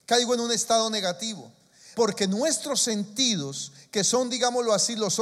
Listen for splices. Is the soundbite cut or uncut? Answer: cut